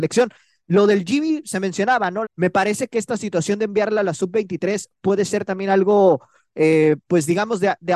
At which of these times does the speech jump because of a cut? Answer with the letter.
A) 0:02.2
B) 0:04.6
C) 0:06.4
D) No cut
A